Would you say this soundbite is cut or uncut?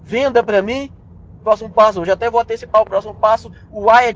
cut